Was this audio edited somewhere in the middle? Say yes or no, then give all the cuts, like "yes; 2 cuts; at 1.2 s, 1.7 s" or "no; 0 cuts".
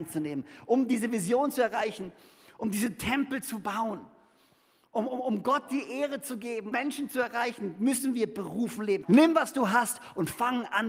yes; 2 cuts; at 6.7 s, 9.0 s